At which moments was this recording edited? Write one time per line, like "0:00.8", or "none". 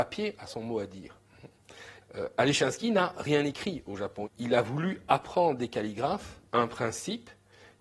0:02.0
0:04.3
0:06.5